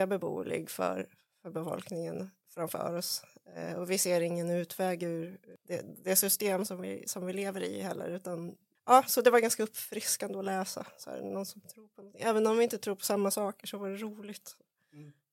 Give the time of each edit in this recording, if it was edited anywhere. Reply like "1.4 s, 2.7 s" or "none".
none